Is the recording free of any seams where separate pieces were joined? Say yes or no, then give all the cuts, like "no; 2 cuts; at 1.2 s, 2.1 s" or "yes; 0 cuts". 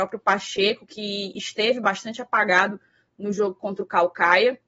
yes; 0 cuts